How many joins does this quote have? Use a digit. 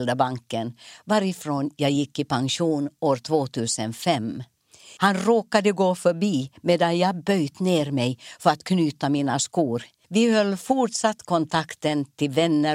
2